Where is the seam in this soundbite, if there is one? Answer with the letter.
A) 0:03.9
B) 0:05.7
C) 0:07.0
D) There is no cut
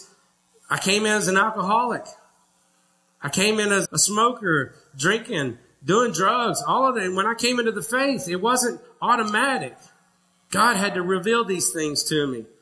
A